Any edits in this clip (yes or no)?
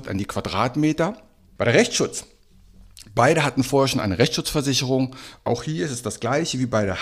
yes